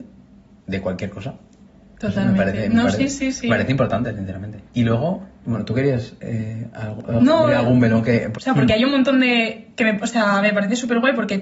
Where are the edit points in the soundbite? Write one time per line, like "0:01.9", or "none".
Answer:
0:04.7
0:08.3